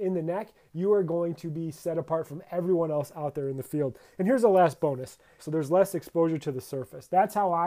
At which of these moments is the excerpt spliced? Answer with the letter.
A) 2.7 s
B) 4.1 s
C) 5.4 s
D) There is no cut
C